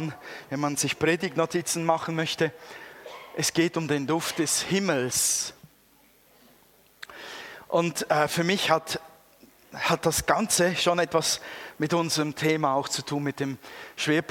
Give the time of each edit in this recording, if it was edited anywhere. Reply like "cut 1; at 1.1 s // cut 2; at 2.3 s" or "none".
none